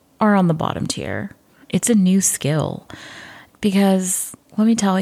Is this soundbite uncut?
no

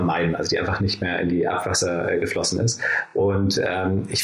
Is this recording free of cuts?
yes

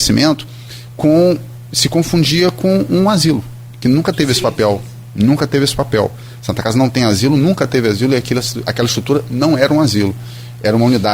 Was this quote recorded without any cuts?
yes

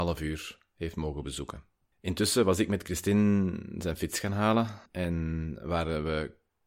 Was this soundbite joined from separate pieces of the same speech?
yes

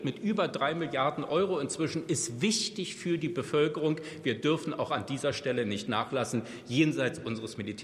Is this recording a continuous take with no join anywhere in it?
yes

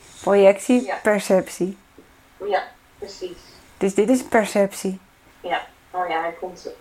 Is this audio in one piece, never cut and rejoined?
no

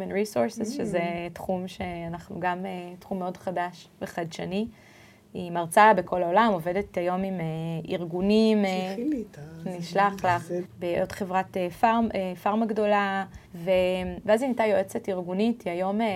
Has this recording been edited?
yes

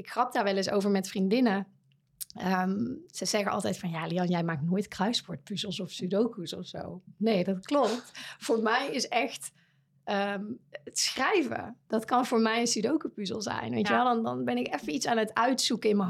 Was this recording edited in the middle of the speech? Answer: no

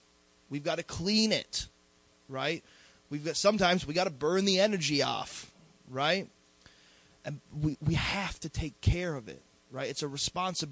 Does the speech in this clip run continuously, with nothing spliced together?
yes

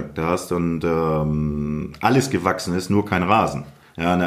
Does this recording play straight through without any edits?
yes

